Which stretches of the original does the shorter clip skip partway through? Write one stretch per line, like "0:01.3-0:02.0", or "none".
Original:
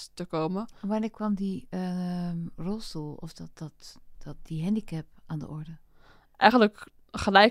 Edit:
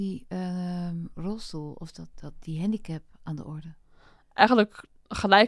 0:03.5-0:04.2

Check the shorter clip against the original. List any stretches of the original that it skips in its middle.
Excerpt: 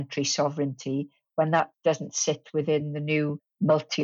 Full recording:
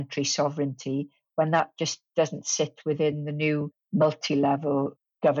0:01.7-0:02.1

